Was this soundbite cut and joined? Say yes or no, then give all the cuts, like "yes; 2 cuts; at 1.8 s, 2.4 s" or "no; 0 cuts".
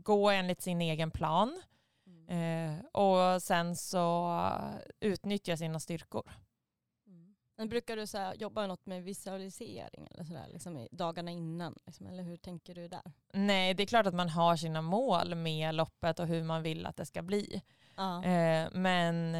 no; 0 cuts